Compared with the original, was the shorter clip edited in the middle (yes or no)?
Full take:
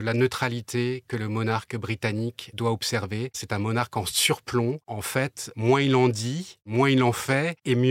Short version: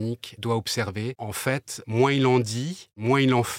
yes